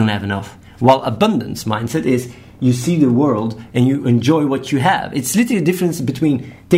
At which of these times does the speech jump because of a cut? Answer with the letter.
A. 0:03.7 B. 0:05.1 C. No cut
C